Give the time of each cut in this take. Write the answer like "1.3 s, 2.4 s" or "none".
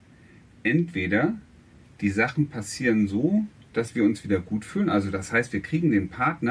none